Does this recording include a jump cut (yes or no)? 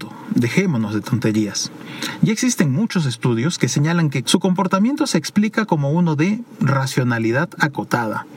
yes